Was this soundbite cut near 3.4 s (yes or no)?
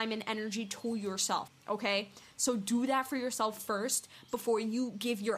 no